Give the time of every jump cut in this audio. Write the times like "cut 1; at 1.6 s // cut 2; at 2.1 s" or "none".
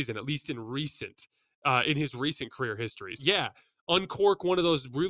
cut 1; at 3.2 s